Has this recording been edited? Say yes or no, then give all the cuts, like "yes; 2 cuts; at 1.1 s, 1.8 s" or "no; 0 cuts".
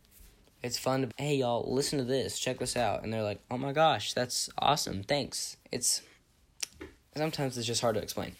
yes; 2 cuts; at 1.1 s, 5.6 s